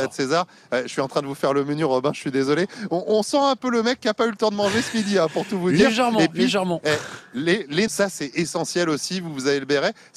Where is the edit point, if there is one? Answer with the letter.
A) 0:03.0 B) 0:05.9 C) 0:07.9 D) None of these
C